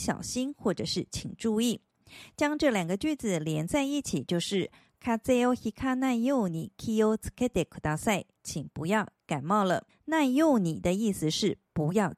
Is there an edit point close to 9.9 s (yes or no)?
yes